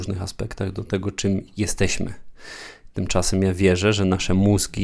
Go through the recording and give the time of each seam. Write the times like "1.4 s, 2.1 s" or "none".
2.9 s